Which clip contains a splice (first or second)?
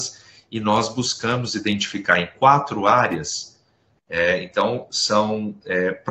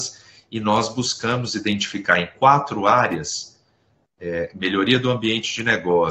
first